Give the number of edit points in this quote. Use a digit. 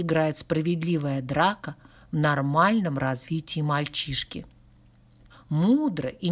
1